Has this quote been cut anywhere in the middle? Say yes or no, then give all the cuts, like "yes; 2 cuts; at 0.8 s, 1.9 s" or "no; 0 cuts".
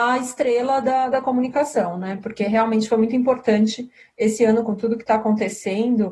yes; 1 cut; at 4.7 s